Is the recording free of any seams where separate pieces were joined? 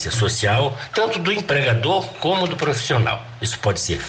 yes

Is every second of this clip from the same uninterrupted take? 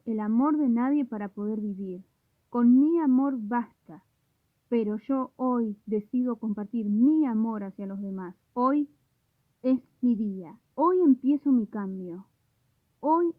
no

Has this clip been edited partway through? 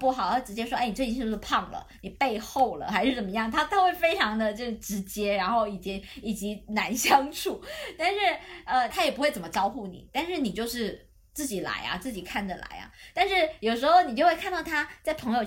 yes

